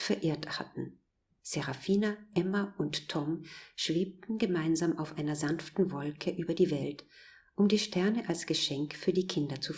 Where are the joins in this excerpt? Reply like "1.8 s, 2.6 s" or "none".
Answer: 1.4 s